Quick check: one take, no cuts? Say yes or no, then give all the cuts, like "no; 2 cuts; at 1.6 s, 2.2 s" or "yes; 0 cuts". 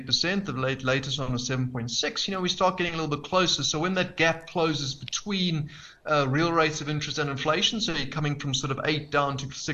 yes; 0 cuts